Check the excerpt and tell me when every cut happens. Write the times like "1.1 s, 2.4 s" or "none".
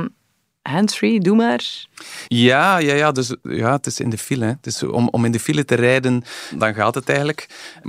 2.3 s